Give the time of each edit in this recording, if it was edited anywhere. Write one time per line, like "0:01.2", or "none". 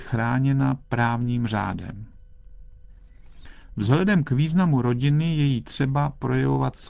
none